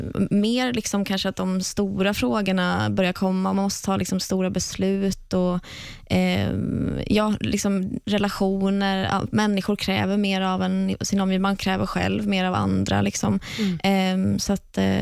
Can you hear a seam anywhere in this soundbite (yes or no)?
no